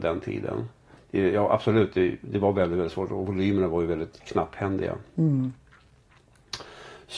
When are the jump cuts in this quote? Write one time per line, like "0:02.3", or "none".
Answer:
0:00.9